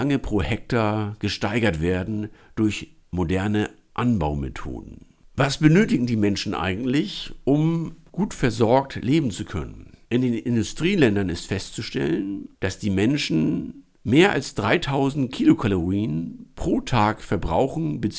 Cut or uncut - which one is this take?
cut